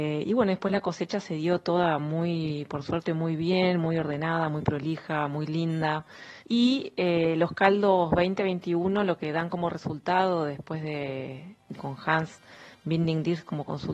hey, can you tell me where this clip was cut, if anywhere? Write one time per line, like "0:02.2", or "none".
0:06.4
0:11.7